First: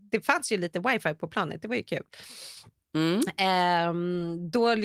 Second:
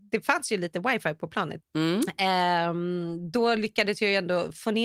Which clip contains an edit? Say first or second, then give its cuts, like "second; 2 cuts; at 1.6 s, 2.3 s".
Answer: second; 1 cut; at 1.6 s